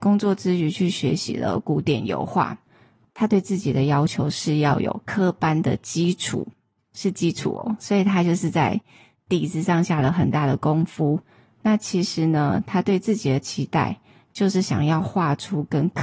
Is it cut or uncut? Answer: uncut